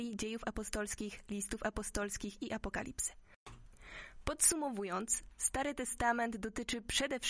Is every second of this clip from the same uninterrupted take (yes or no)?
yes